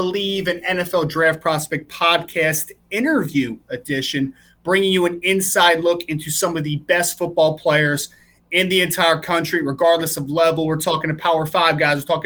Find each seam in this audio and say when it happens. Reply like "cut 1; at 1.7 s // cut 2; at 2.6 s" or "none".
none